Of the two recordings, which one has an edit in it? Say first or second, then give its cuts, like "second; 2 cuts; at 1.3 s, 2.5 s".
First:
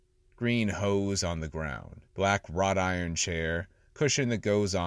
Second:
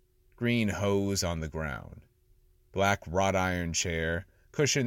first; 1 cut; at 2.1 s